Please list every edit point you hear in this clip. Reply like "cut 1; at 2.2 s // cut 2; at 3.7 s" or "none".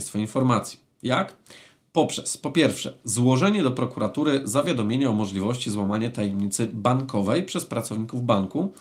none